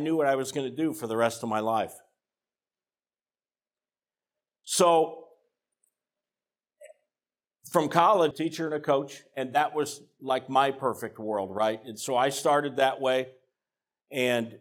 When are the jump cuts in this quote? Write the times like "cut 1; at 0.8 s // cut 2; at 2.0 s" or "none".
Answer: cut 1; at 8.3 s